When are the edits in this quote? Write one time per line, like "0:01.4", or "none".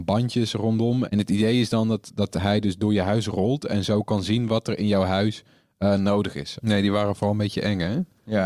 0:01.0
0:06.6